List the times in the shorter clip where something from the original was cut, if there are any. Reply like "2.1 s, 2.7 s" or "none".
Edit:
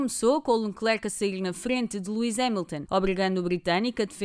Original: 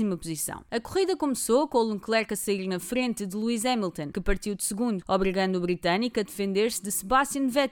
2.9 s